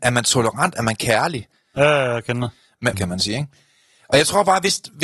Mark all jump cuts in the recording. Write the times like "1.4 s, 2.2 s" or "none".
1.8 s, 2.9 s